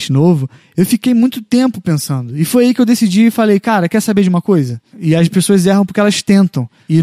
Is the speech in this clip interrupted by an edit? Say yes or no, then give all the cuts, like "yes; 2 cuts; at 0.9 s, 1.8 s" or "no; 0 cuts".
yes; 1 cut; at 4.9 s